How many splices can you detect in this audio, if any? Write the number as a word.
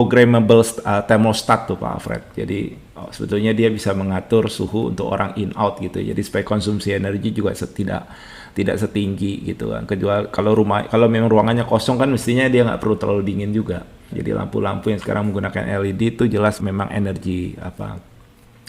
two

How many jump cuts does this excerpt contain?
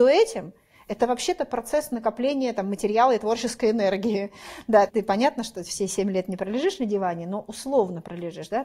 one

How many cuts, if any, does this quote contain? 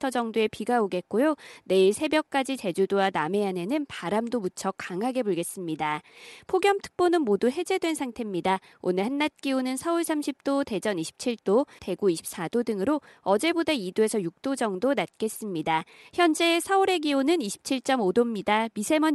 one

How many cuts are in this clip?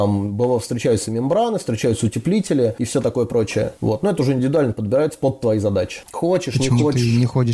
one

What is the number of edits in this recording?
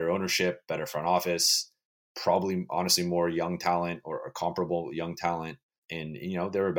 zero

